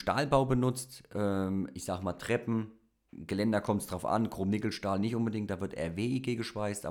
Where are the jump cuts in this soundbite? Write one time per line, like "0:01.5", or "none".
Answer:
none